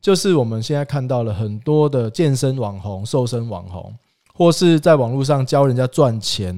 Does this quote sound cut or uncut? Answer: uncut